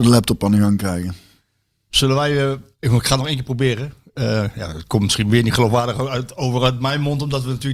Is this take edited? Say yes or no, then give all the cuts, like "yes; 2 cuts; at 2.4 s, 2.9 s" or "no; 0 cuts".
no; 0 cuts